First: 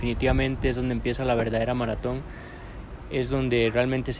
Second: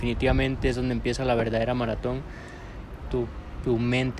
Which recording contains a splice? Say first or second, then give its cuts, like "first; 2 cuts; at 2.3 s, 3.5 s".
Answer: second; 1 cut; at 3.0 s